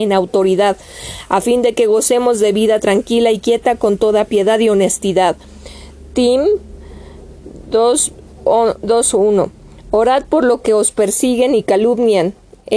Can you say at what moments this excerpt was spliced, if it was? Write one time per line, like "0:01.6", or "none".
none